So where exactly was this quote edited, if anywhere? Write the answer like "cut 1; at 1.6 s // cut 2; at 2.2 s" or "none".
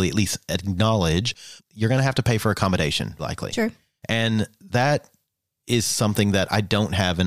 cut 1; at 1.6 s // cut 2; at 3.2 s

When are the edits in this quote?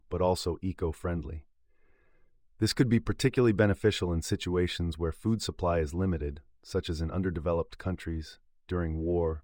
none

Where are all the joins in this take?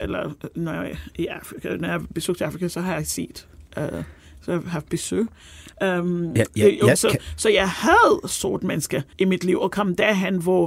cut 1; at 6.9 s // cut 2; at 9.1 s

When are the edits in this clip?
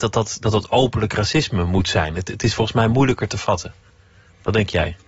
none

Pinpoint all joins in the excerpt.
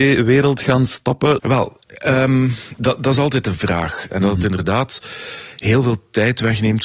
cut 1; at 1.4 s // cut 2; at 4.1 s

